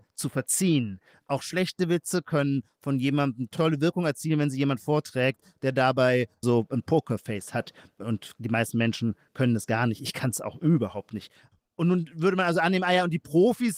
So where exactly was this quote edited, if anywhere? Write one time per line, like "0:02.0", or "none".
none